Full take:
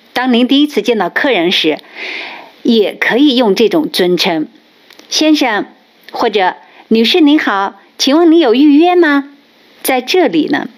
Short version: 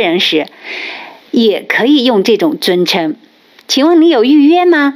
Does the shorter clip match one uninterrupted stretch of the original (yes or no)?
no